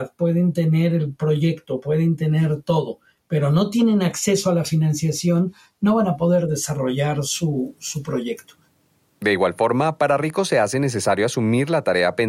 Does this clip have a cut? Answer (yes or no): no